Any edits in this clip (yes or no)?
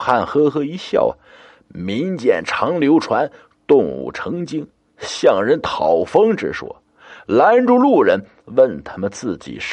no